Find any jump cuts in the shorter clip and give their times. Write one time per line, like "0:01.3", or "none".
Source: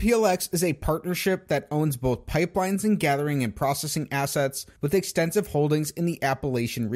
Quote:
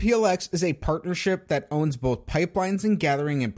none